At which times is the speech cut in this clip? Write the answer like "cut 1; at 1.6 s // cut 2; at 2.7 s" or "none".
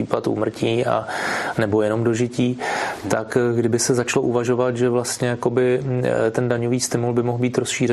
cut 1; at 1.5 s